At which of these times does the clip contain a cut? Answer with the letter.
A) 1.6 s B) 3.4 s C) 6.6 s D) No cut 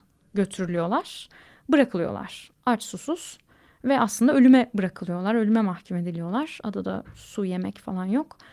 D